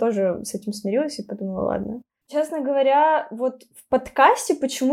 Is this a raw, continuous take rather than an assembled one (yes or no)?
no